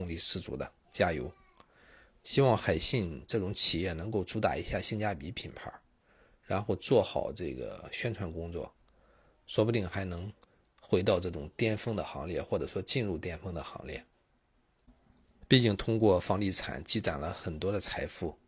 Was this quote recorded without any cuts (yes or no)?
yes